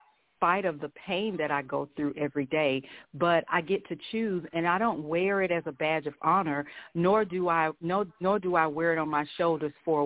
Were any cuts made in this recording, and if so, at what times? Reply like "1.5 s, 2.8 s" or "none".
none